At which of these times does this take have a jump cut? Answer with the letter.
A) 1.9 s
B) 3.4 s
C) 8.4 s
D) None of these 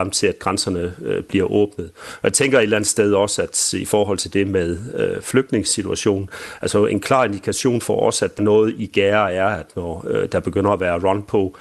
C